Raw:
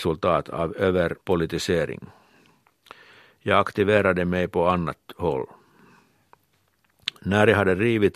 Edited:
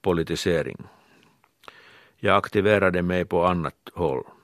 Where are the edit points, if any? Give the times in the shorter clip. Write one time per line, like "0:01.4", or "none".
none